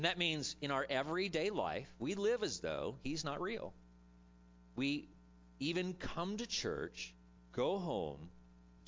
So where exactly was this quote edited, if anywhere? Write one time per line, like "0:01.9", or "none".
0:07.4